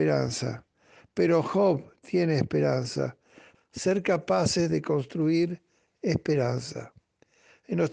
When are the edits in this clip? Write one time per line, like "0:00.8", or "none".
0:03.5